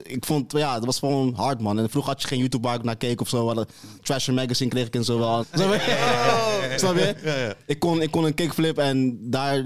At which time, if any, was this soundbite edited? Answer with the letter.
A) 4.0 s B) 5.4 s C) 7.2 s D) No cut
B